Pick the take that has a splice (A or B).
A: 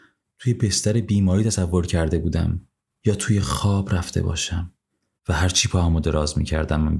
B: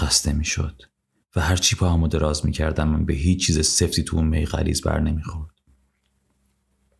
A